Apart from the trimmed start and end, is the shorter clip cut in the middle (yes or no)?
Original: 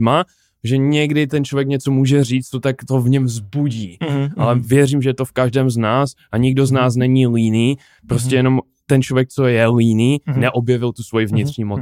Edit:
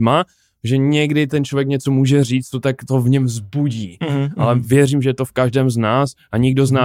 no